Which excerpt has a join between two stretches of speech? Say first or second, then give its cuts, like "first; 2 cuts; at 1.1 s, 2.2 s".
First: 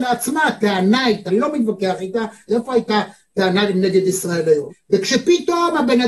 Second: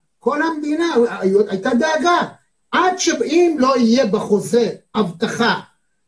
first; 3 cuts; at 1.3 s, 2.5 s, 4.7 s